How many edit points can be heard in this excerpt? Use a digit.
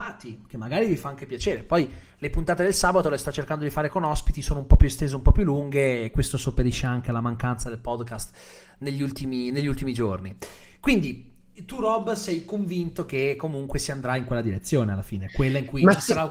0